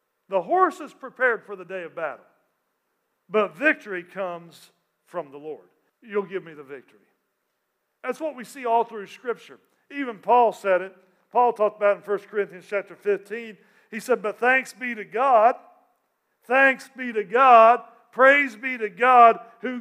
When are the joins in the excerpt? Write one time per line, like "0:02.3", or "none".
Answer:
0:05.9